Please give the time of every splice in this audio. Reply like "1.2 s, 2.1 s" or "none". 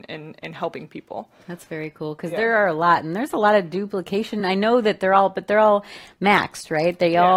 none